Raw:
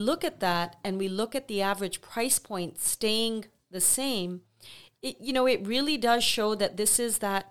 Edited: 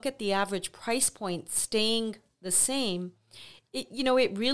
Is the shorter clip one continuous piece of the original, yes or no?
yes